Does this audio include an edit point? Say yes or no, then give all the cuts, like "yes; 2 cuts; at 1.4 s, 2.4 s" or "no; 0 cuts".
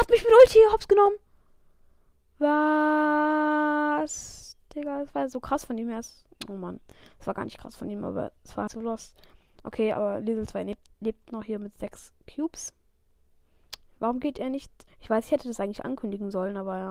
yes; 2 cuts; at 8.7 s, 14.9 s